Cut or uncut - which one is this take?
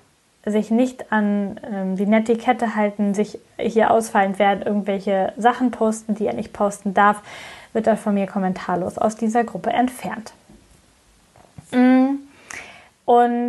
uncut